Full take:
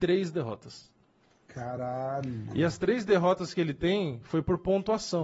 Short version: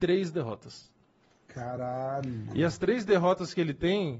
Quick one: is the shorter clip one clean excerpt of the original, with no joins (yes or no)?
yes